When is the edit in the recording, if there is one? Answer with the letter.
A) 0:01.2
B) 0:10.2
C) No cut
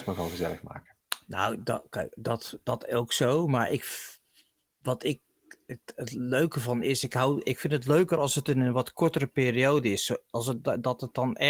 C